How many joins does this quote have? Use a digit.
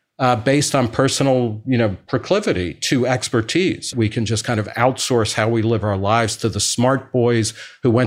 1